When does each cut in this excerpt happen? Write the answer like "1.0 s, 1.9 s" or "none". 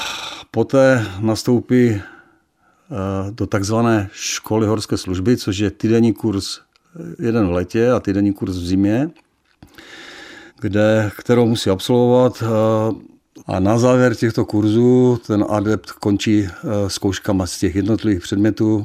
10.5 s, 13.4 s